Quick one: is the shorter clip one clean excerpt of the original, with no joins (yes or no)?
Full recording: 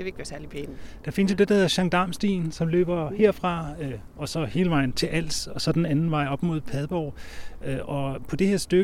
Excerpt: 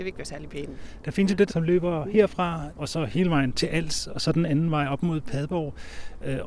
no